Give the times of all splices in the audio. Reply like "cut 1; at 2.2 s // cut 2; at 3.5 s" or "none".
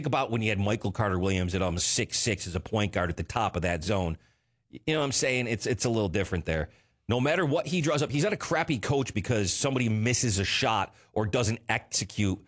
cut 1; at 6.9 s